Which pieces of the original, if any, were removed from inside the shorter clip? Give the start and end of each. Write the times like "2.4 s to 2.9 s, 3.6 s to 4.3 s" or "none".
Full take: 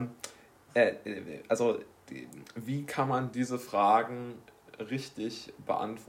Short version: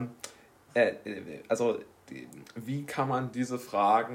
none